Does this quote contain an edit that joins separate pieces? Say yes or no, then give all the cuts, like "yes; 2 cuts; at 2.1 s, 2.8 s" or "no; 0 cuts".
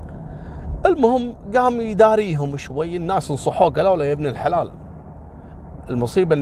yes; 1 cut; at 2.6 s